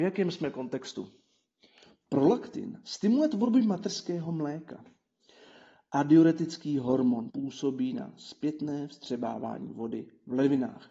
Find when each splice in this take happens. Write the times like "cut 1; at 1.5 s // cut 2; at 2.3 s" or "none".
cut 1; at 7.3 s